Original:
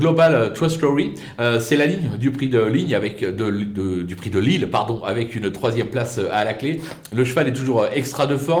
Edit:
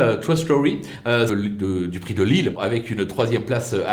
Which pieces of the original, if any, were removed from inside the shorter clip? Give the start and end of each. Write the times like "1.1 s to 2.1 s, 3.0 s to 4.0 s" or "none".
1.6 s to 3.4 s, 4.7 s to 5.0 s